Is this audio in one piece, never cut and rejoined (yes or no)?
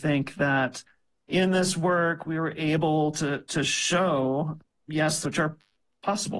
no